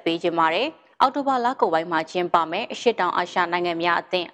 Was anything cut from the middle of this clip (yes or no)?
yes